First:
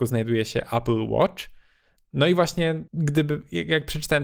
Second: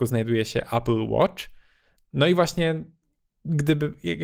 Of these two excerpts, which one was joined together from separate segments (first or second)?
first